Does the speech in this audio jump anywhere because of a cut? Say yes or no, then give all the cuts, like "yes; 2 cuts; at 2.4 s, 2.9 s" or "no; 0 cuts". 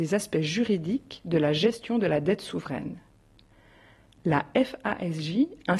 no; 0 cuts